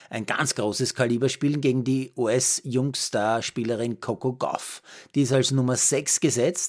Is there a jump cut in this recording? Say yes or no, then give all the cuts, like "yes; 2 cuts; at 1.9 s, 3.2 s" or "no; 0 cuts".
no; 0 cuts